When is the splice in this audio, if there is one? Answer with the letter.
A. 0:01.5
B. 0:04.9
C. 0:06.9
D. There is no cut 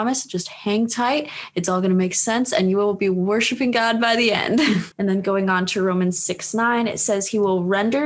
B